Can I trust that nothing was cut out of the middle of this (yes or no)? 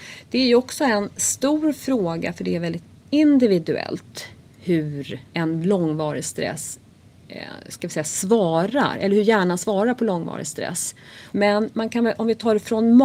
no